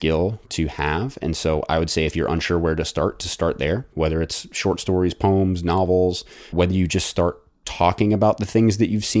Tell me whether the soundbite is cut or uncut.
cut